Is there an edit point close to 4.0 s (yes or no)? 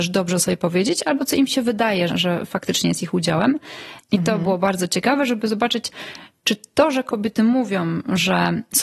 yes